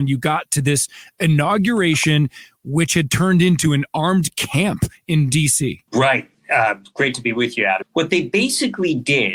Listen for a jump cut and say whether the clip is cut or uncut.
cut